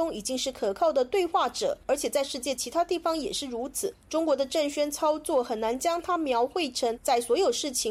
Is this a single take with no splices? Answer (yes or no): yes